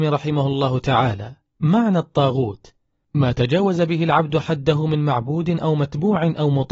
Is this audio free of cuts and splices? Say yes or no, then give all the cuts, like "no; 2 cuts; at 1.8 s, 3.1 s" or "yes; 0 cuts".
yes; 0 cuts